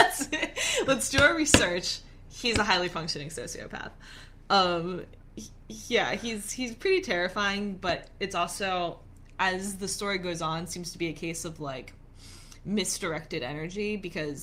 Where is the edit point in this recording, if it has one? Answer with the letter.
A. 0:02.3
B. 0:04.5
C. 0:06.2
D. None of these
D